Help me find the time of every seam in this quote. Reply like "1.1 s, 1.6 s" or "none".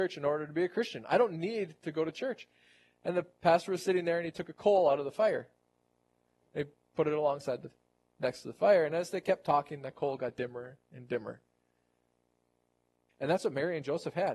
13.1 s